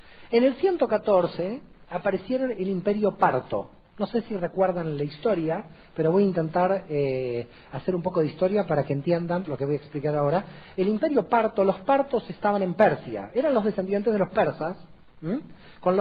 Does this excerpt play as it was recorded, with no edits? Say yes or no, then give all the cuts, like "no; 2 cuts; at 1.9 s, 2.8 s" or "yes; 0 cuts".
no; 1 cut; at 9.4 s